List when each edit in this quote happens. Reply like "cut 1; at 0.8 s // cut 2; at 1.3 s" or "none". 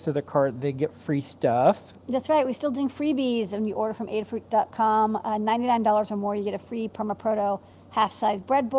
none